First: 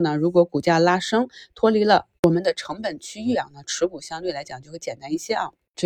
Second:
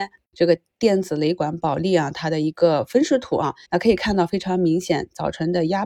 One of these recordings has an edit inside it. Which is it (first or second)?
second